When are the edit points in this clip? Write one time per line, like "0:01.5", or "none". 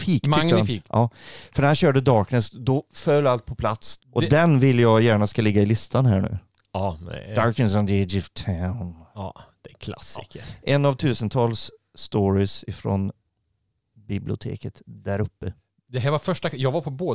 0:04.0